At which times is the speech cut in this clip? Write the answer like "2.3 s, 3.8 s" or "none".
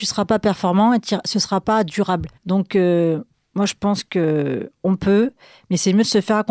2.4 s